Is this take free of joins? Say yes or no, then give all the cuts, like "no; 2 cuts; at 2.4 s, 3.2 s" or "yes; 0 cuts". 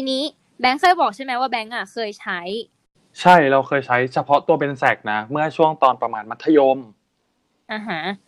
yes; 0 cuts